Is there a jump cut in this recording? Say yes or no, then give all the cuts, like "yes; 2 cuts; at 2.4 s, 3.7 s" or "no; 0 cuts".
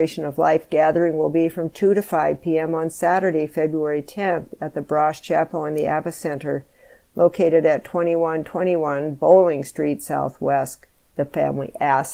no; 0 cuts